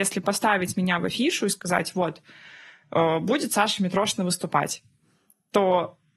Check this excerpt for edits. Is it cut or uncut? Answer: uncut